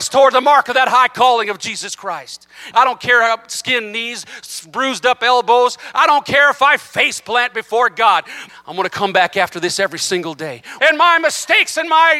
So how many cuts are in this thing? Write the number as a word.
three